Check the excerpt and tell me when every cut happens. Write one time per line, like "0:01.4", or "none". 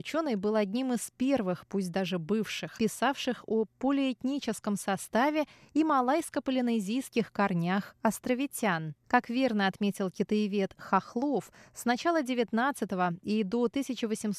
0:02.8
0:09.0